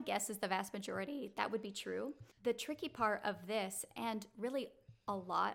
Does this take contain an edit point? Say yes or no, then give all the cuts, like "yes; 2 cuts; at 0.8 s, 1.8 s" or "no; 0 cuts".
yes; 1 cut; at 2.3 s